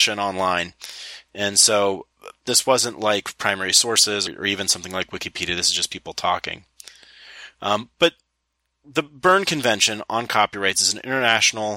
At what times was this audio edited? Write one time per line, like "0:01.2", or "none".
0:04.3

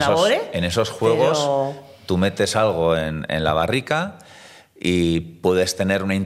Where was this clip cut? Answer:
none

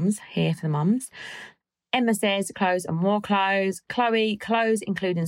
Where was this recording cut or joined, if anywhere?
0:02.5

